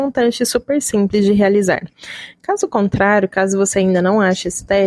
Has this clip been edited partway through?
no; 0 cuts

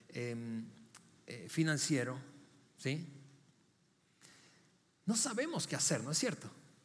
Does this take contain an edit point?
no; 0 cuts

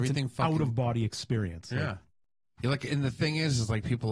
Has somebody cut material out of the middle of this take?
no; 0 cuts

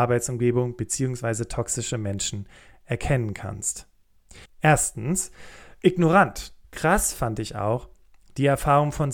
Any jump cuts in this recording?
yes; 2 cuts; at 4.4 s, 6.6 s

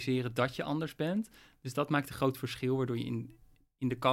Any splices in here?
no; 0 cuts

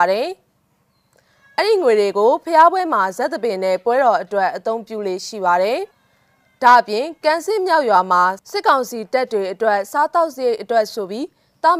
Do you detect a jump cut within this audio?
yes; 1 cut; at 5.9 s

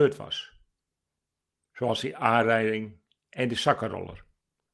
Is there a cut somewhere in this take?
no; 0 cuts

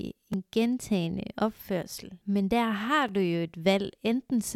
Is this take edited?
no; 0 cuts

